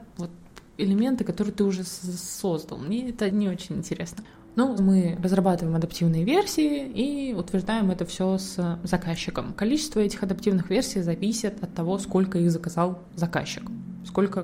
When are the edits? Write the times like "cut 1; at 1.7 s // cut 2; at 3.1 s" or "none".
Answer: cut 1; at 3.3 s // cut 2; at 4.8 s